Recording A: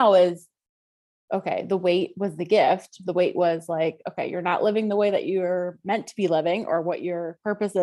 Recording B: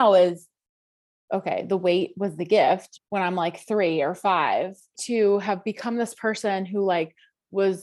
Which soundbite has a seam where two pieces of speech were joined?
B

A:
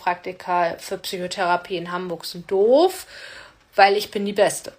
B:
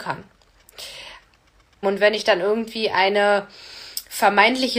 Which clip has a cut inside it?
B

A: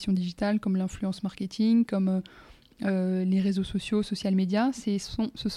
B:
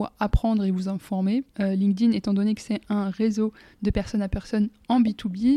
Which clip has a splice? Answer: B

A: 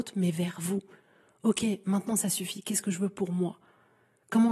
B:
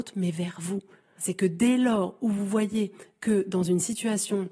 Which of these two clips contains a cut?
B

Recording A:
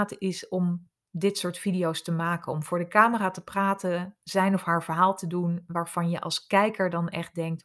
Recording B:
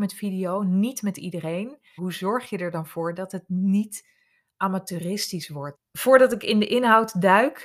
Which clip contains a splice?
B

